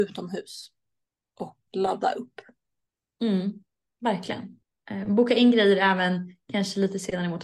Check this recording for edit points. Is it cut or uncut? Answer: cut